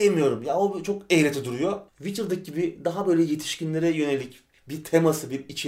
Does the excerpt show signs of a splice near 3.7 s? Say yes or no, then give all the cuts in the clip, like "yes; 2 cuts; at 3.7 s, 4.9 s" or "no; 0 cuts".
no; 1 cut; at 1.9 s